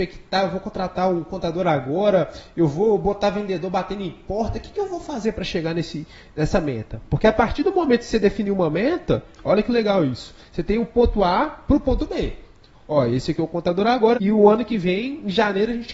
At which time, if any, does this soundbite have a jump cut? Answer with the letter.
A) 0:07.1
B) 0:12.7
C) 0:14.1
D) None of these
C